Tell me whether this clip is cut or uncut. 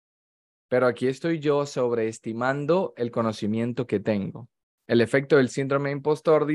cut